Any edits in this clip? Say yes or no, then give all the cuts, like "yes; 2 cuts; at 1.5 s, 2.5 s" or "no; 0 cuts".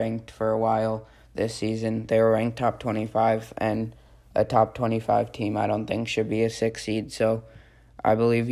no; 0 cuts